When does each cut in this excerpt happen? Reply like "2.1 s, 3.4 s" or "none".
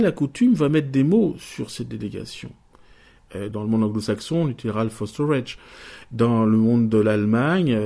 3.5 s